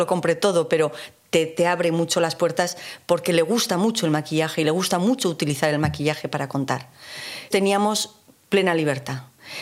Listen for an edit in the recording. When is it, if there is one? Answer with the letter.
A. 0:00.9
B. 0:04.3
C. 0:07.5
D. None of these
C